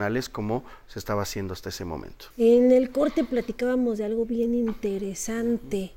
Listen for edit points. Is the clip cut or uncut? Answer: cut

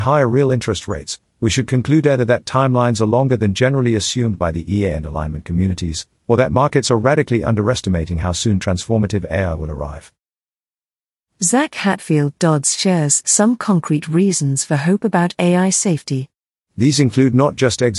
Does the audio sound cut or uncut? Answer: cut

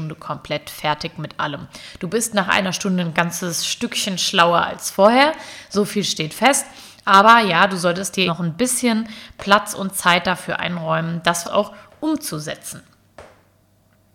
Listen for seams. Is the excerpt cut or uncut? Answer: cut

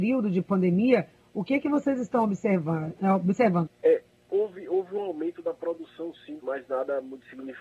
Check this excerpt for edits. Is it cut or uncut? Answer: cut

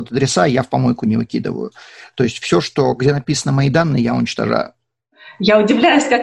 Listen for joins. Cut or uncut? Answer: uncut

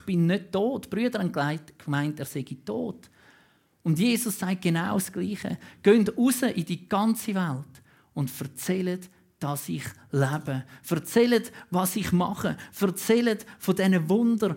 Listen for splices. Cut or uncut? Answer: uncut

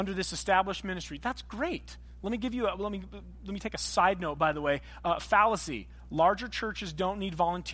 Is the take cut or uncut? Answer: uncut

